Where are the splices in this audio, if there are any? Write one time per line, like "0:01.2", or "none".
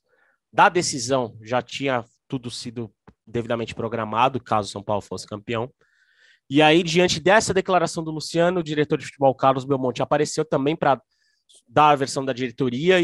none